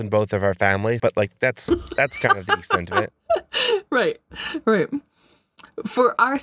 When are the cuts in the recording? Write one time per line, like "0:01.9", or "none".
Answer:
0:01.0

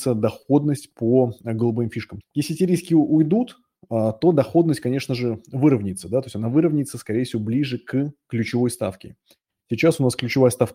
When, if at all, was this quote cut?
0:02.2

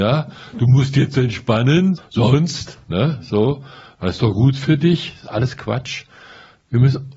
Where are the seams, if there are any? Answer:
0:02.0

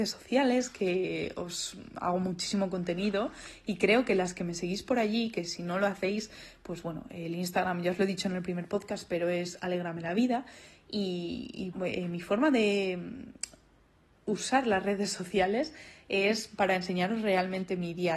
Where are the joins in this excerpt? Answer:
0:11.7

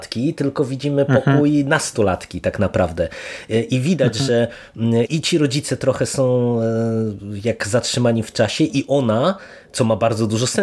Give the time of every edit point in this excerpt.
0:05.1

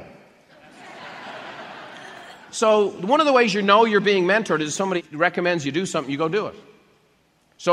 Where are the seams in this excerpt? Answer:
none

